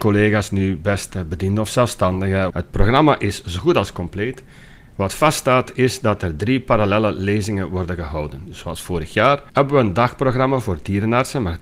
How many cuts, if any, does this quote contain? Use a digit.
2